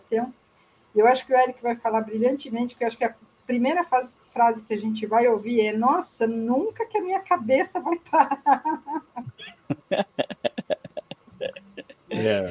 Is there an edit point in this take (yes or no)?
no